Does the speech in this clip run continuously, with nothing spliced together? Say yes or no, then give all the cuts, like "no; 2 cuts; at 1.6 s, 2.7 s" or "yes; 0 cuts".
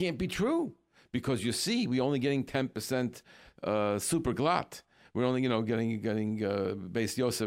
yes; 0 cuts